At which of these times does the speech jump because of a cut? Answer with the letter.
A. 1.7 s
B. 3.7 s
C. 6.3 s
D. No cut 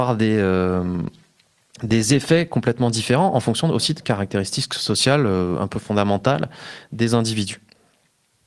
D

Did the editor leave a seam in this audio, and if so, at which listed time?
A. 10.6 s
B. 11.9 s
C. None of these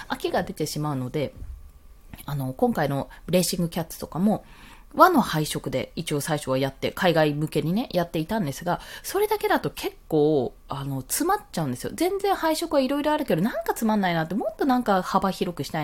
A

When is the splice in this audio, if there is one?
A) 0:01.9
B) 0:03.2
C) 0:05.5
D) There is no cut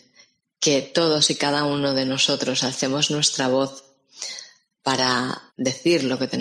C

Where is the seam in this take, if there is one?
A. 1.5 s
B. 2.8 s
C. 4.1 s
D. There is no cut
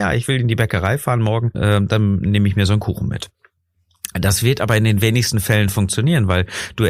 A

